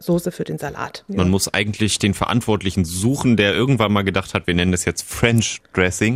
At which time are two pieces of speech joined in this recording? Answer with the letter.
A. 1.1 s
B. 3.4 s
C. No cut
A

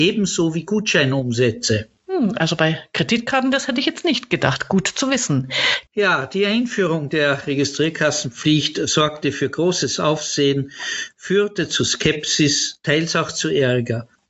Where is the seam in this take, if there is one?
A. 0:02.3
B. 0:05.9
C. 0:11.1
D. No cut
B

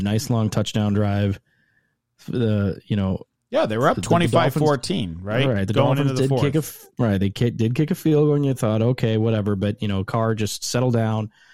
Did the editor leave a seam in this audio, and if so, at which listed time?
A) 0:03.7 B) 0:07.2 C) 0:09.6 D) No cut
D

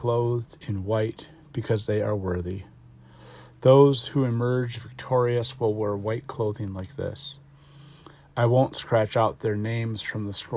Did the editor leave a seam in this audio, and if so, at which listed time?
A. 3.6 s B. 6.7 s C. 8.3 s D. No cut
D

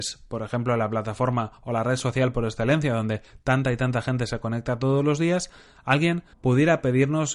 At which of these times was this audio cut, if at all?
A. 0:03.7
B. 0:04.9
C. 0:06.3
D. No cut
C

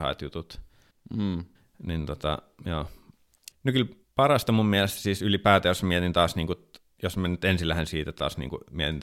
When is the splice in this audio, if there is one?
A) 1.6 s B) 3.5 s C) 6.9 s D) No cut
B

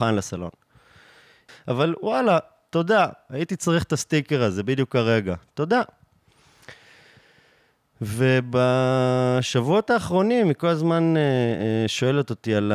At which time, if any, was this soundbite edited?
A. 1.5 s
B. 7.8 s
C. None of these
A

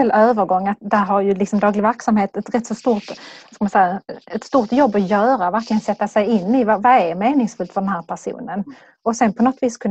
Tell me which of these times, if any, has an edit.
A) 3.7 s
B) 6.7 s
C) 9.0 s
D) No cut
D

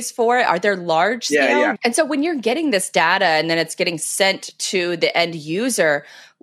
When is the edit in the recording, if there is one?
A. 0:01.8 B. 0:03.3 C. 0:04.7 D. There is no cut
A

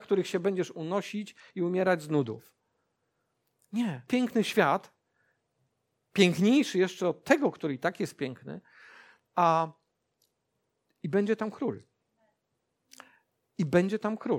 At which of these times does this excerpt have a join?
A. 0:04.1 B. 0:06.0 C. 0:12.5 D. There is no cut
A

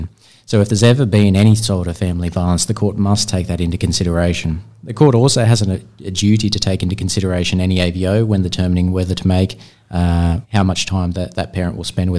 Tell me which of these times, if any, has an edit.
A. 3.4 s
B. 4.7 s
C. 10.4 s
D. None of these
C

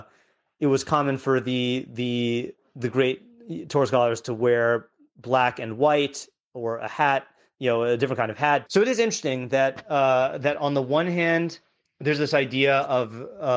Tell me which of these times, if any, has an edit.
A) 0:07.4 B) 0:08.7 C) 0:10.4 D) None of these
B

